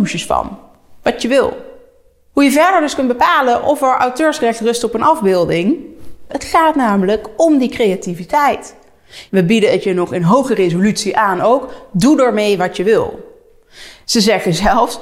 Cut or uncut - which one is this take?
cut